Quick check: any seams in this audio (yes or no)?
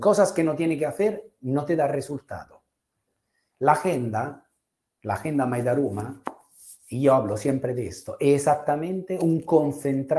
no